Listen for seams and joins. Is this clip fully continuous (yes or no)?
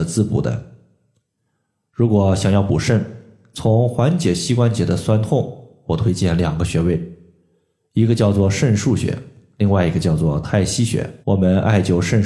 no